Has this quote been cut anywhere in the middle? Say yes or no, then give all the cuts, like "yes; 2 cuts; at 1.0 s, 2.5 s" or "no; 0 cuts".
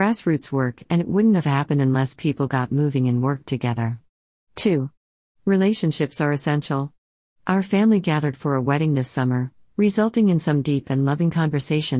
no; 0 cuts